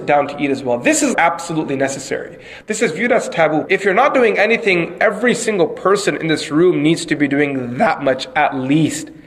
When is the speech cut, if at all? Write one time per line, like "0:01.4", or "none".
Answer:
0:01.1
0:02.6
0:03.6